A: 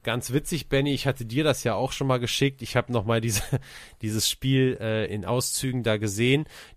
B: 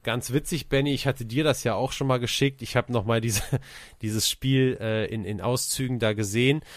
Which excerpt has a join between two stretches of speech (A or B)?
A